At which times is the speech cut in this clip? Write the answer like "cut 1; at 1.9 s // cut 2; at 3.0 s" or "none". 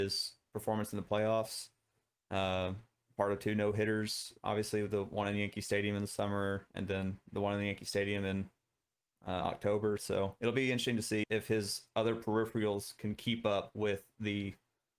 cut 1; at 10.0 s // cut 2; at 11.2 s